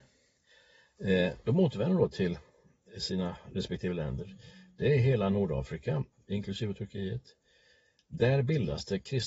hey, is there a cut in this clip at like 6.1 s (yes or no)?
yes